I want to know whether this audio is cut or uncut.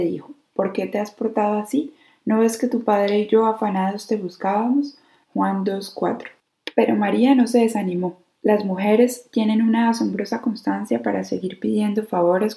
cut